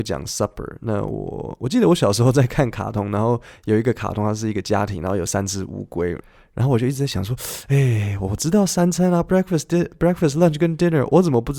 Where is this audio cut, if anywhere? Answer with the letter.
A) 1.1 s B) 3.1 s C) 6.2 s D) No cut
C